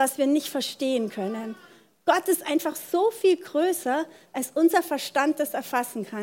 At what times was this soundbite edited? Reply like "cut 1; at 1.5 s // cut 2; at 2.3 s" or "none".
none